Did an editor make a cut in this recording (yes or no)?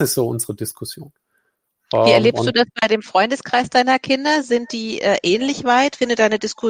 no